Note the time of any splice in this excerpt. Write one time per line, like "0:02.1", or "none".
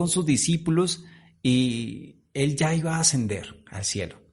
none

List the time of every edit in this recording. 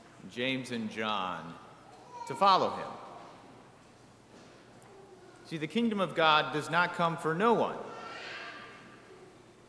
none

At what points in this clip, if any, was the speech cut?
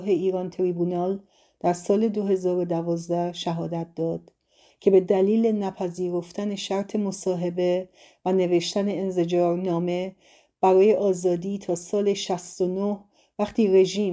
0:04.7

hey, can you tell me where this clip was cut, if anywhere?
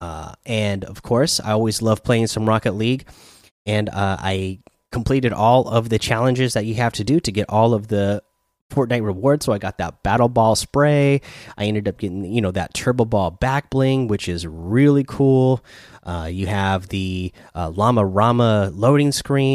none

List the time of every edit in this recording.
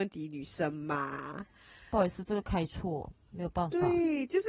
none

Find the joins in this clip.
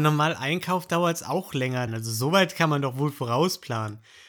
0:01.9

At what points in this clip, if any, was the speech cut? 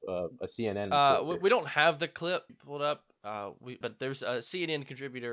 0:02.5
0:03.8

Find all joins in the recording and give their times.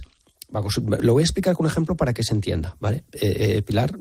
none

